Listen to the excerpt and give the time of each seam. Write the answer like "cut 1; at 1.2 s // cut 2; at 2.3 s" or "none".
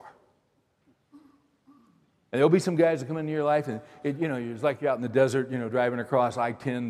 none